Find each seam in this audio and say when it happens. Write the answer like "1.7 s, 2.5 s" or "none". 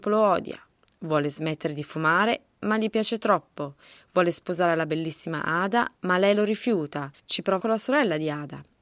7.6 s